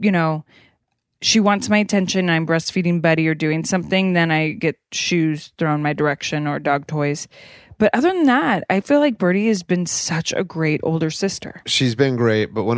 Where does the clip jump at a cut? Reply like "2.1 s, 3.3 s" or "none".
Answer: none